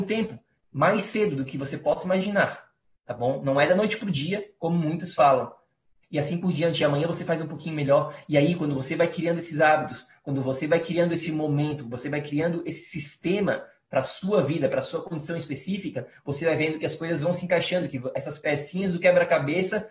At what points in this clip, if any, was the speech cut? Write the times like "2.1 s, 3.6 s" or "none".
6.0 s